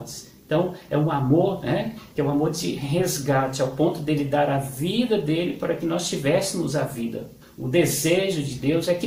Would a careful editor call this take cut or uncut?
uncut